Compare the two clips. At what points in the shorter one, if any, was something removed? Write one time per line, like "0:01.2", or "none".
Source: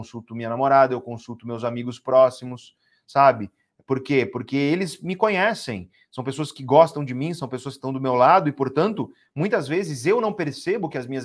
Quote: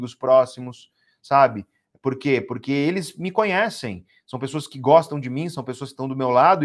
none